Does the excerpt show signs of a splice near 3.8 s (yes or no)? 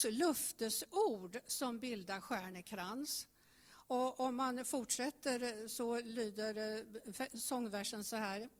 no